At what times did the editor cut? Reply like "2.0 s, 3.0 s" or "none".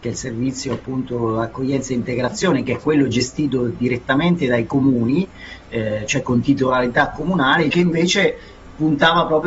7.7 s